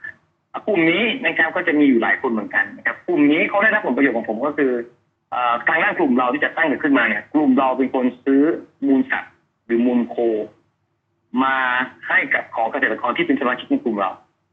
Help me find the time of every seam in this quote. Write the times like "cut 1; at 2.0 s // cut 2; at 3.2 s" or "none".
none